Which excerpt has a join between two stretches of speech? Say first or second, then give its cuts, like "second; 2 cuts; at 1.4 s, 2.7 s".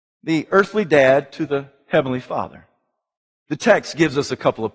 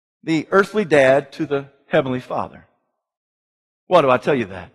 first; 1 cut; at 3.3 s